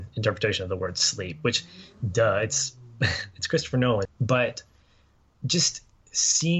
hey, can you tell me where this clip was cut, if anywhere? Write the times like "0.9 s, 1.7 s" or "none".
4.1 s